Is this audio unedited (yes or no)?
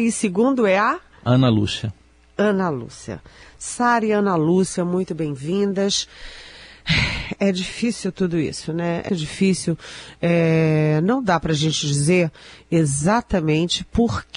no